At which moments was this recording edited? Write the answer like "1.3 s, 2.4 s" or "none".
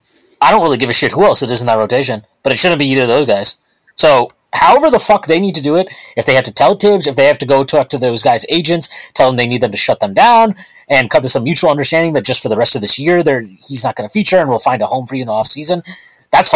none